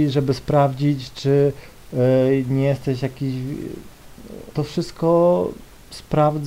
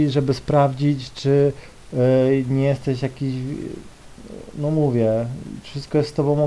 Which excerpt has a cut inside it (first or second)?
first